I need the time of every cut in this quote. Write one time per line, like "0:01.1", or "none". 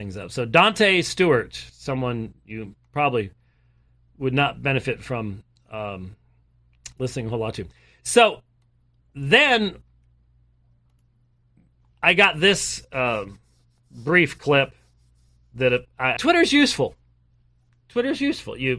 0:16.2